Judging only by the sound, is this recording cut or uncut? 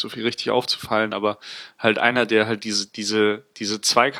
uncut